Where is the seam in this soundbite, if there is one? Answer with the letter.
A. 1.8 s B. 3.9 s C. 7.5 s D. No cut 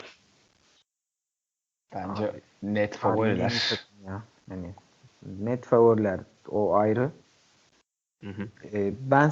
D